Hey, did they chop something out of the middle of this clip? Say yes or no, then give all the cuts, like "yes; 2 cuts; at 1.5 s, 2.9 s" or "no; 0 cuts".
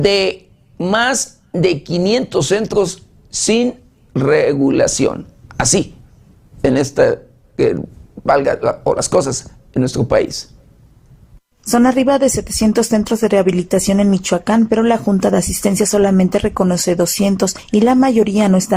no; 0 cuts